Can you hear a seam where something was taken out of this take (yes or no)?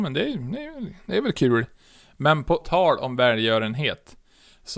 yes